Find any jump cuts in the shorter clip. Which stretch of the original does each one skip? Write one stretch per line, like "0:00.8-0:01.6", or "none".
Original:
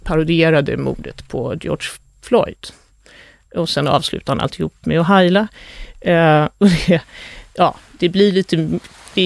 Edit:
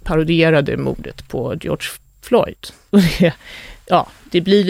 0:02.9-0:06.6